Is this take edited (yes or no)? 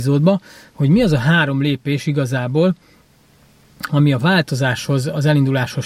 no